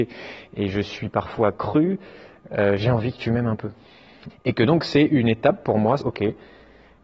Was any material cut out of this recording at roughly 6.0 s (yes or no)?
yes